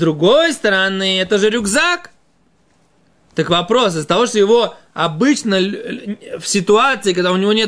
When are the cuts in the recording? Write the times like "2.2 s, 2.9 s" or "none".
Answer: none